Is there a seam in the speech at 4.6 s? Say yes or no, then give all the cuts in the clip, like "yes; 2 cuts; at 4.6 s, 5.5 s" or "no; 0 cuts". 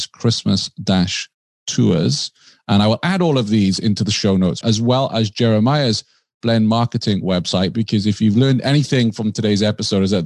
yes; 1 cut; at 4.6 s